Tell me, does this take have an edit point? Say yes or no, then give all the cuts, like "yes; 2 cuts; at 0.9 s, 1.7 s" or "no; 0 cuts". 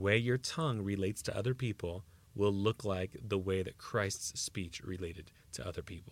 no; 0 cuts